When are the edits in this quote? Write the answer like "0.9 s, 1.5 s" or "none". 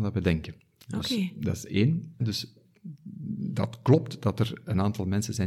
2.2 s